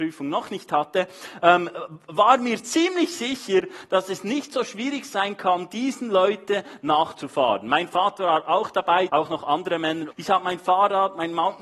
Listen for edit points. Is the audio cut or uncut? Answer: cut